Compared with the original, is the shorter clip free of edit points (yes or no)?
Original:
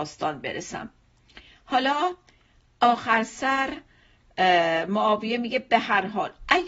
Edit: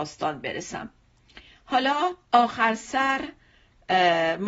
no